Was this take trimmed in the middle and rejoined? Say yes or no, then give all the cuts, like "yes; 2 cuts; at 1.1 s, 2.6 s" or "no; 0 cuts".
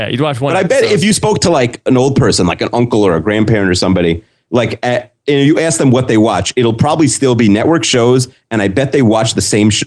no; 0 cuts